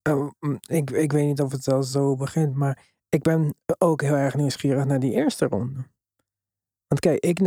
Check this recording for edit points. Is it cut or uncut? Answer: uncut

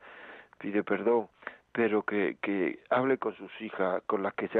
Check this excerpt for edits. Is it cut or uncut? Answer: cut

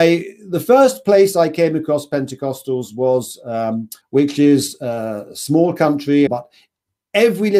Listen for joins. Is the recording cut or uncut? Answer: cut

